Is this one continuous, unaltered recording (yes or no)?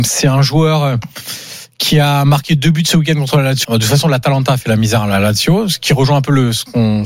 no